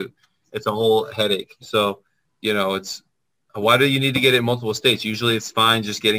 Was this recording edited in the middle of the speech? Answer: yes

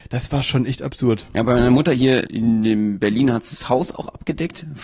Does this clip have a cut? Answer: no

